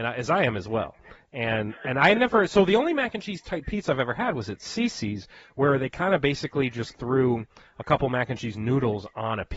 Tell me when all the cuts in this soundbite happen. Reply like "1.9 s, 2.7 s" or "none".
none

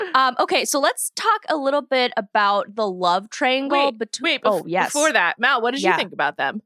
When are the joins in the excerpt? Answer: none

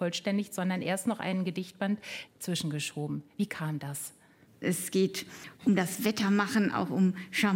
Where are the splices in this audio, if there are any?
2.3 s, 4.6 s

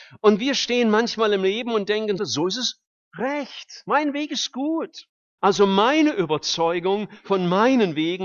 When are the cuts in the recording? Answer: 2.2 s, 5.4 s

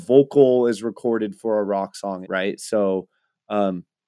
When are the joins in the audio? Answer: 2.2 s

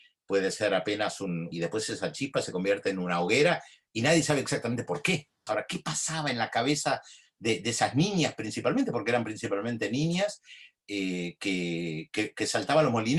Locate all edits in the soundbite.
1.5 s, 5.5 s

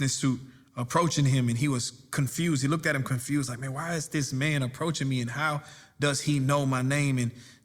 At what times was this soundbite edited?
none

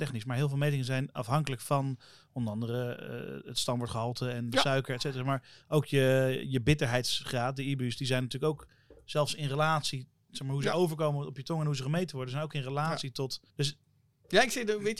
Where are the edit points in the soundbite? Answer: 13.5 s

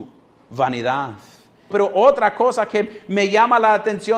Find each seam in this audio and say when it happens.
1.7 s

